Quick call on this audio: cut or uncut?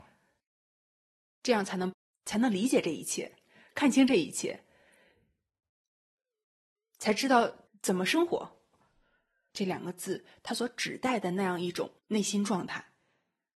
cut